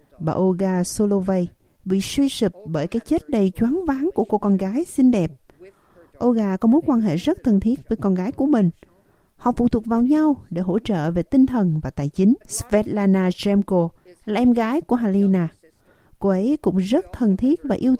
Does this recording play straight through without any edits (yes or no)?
no